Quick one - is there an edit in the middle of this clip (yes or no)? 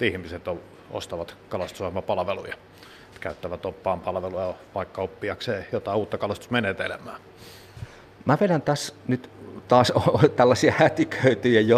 no